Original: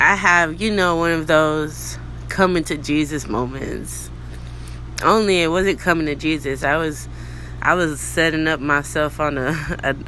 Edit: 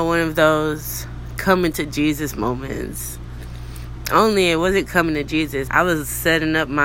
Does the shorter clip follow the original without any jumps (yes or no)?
no